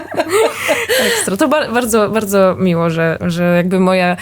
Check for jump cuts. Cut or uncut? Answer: cut